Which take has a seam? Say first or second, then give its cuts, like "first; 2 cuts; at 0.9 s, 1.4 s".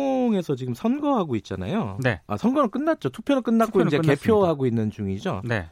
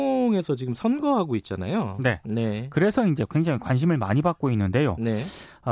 second; 1 cut; at 2.2 s